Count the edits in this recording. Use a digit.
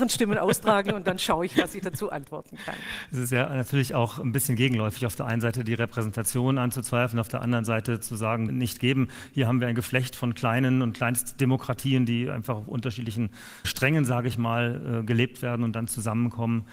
2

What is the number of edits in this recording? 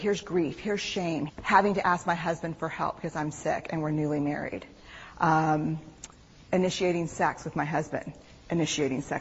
1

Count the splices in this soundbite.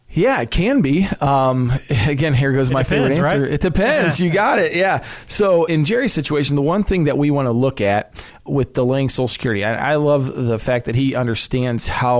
0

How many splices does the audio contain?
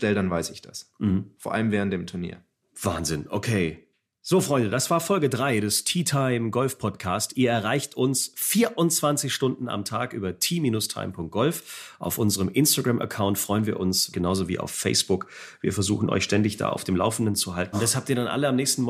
2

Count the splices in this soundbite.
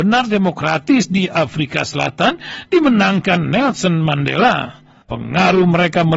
1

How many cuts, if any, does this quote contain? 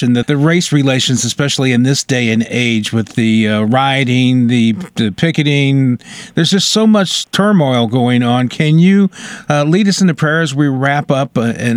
0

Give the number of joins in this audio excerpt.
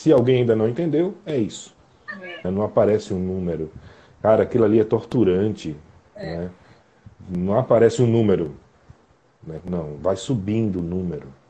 2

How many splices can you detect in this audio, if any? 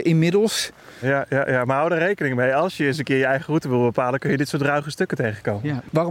1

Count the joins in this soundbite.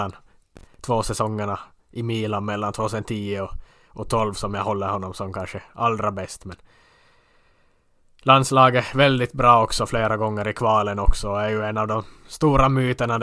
0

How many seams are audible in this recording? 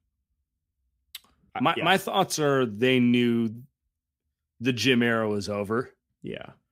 1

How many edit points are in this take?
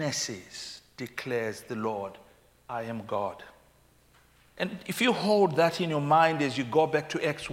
0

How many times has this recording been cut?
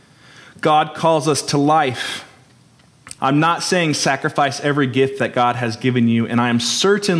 1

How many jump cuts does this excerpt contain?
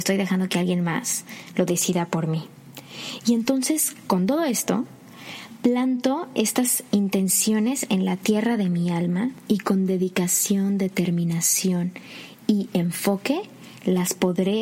0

